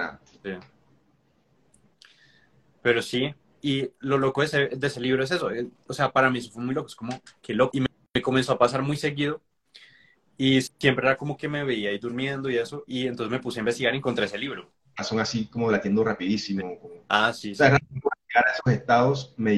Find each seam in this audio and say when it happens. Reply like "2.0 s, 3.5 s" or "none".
7.7 s, 14.9 s